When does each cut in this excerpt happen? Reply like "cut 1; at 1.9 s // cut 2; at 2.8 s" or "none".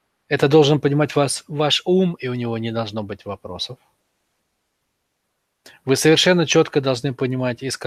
none

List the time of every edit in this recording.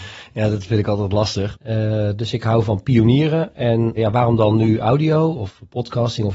cut 1; at 1.5 s // cut 2; at 4.0 s

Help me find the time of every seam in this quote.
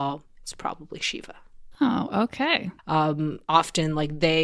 cut 1; at 2.8 s

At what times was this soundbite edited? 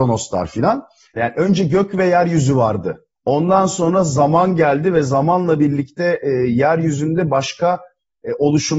cut 1; at 1.2 s // cut 2; at 3.1 s

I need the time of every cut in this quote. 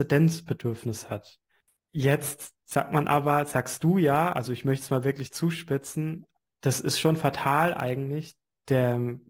cut 1; at 1.8 s

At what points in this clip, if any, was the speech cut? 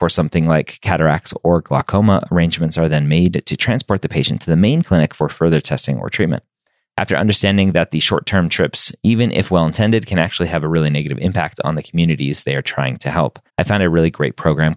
cut 1; at 6.9 s // cut 2; at 13.5 s

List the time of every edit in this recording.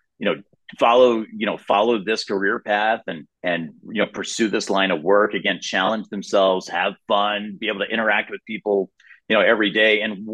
cut 1; at 3.3 s

